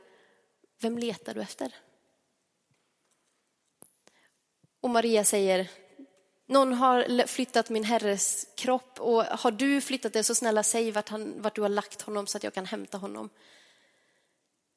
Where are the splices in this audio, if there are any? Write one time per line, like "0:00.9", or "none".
none